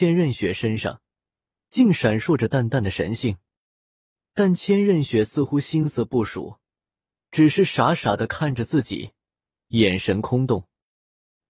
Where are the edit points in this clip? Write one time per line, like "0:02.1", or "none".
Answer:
none